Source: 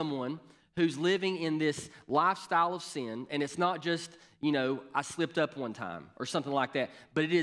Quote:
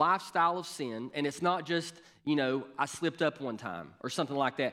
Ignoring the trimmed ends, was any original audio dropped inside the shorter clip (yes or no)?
no